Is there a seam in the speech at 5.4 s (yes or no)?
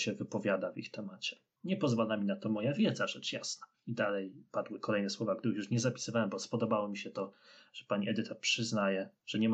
no